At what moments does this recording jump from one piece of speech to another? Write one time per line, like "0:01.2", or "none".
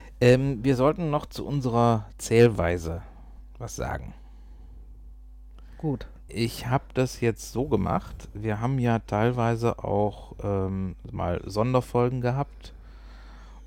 0:06.3